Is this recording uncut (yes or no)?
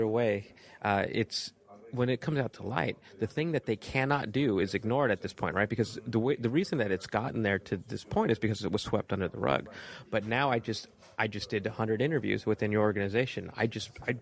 yes